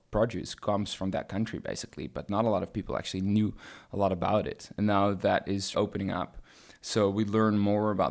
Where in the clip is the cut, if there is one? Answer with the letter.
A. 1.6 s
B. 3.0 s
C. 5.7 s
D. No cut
C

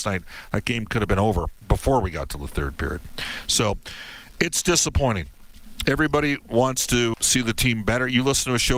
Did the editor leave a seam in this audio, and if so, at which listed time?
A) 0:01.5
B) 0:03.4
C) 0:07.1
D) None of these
C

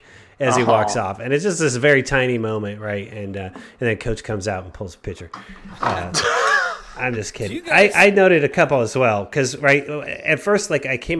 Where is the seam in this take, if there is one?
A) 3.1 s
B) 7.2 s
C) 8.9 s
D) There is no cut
D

